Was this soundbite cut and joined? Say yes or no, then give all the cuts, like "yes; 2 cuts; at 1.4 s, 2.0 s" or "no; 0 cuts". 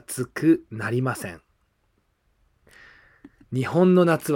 no; 0 cuts